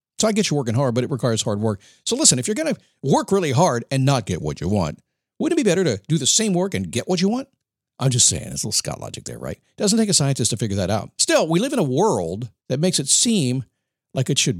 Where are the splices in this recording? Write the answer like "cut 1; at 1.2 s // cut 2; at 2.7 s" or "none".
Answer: cut 1; at 11.2 s // cut 2; at 12.6 s